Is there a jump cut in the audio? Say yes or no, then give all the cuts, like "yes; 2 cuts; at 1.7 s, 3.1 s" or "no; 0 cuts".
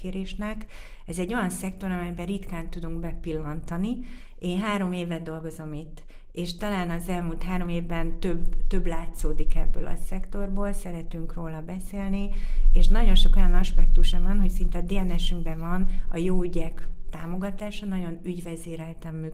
no; 0 cuts